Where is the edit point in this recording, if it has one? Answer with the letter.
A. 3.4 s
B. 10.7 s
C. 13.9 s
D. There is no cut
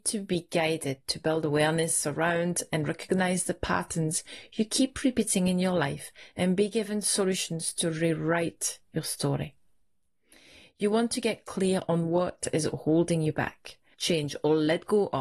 C